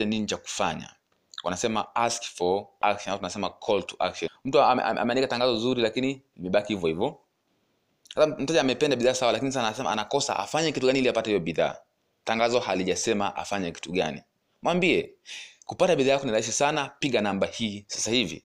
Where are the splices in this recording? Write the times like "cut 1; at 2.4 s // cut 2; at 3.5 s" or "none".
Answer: cut 1; at 4.3 s

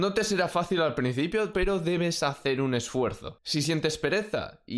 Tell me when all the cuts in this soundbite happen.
cut 1; at 1.5 s

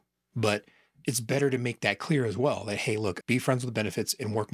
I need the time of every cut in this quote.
cut 1; at 3.2 s

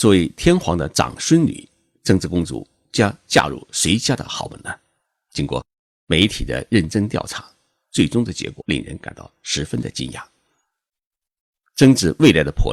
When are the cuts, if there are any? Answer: cut 1; at 8.6 s

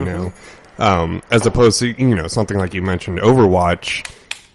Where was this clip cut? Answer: none

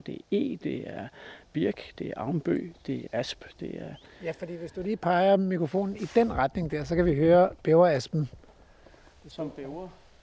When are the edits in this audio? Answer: cut 1; at 3.1 s

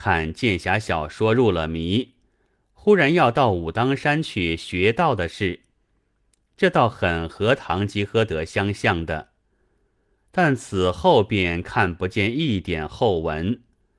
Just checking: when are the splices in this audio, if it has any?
none

